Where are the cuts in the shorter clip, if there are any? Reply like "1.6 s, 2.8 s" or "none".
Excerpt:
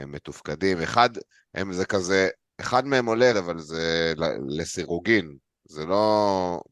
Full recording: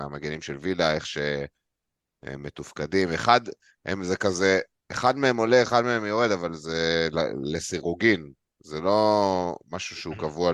3.3 s